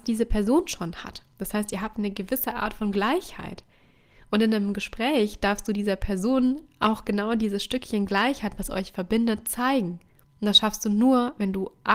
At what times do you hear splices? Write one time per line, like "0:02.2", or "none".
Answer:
none